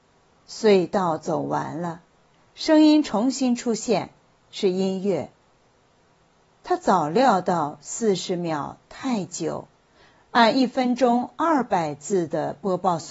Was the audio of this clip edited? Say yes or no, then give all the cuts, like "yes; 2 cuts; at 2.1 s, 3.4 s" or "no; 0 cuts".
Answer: no; 0 cuts